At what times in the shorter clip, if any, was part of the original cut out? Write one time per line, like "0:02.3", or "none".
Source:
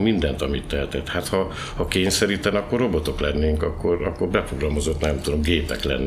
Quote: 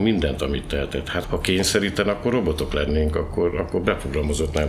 0:01.2